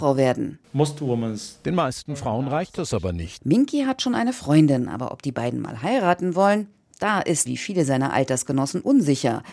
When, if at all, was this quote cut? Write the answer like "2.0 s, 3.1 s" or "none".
3.4 s, 7.5 s